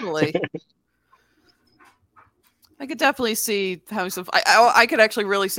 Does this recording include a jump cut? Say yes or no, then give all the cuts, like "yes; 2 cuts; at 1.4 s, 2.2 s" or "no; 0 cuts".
no; 0 cuts